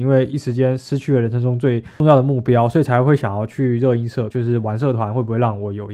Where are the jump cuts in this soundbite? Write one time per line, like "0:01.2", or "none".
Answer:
0:04.3